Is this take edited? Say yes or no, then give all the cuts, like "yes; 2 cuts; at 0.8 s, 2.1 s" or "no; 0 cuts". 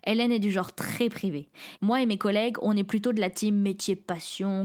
yes; 1 cut; at 1.8 s